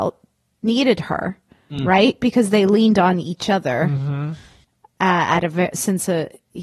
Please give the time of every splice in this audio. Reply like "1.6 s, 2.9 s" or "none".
none

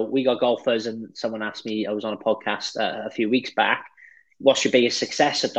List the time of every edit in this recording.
none

